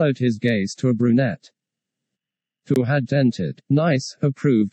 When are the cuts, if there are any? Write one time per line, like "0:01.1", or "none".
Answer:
0:03.1